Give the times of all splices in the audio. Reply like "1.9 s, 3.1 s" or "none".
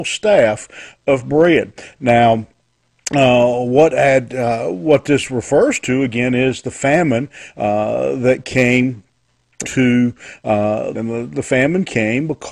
9.6 s, 10.9 s